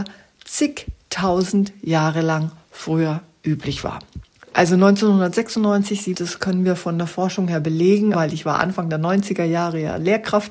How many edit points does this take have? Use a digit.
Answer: 2